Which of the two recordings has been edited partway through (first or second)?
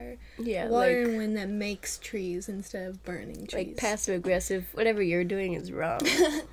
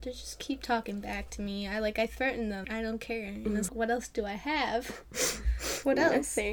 second